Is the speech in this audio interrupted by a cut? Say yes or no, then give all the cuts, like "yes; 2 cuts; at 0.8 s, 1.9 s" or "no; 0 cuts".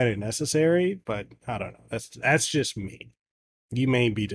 yes; 1 cut; at 1.0 s